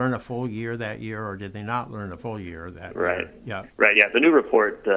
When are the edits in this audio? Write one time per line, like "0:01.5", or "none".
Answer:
none